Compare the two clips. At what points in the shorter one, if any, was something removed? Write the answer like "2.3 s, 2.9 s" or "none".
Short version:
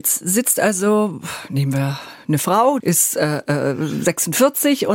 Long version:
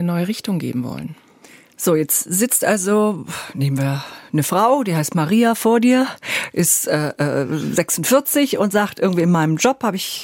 2.8 s